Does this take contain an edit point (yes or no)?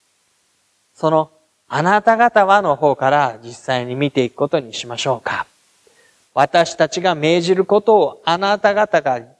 no